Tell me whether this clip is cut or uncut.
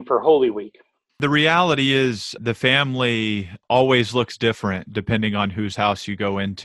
cut